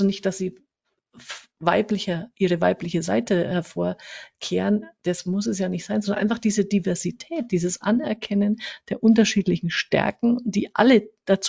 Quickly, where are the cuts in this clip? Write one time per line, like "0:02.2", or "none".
none